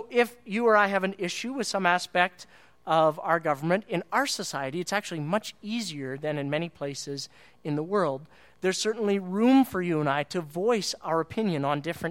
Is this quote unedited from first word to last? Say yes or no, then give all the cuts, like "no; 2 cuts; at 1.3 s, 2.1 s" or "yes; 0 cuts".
yes; 0 cuts